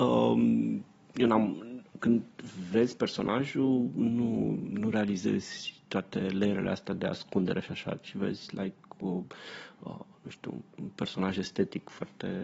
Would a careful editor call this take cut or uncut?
cut